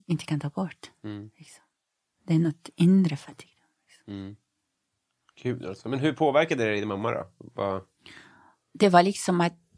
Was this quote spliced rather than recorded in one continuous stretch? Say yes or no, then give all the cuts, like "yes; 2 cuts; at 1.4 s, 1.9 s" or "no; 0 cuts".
no; 0 cuts